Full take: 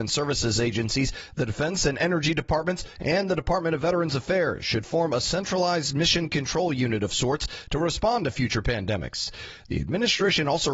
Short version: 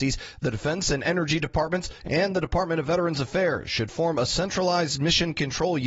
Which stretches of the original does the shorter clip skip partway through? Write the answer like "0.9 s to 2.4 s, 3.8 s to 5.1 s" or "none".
none